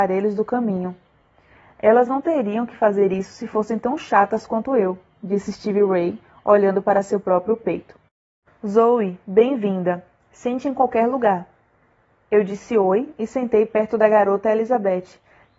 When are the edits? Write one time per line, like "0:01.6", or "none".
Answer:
0:08.5